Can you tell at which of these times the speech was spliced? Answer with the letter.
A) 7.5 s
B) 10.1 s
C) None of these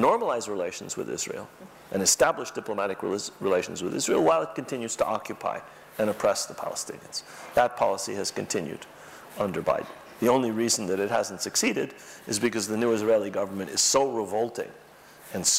C